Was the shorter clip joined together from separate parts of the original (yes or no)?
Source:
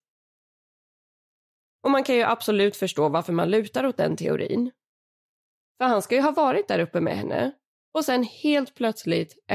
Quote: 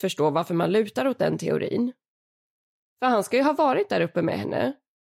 no